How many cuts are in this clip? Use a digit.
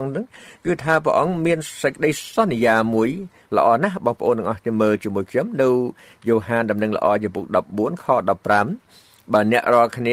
0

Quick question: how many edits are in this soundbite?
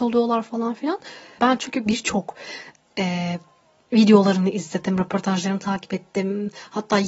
1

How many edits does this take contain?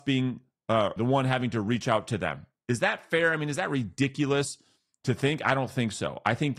1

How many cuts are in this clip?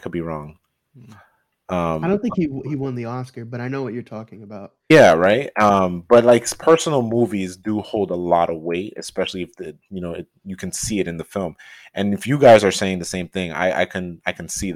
0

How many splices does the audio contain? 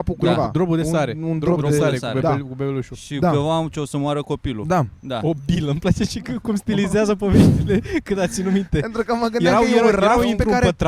0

